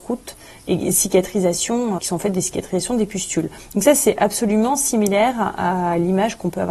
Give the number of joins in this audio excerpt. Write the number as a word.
one